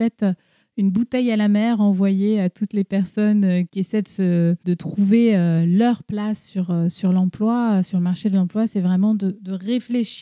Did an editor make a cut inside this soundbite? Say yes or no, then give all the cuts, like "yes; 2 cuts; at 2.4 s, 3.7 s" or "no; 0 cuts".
no; 0 cuts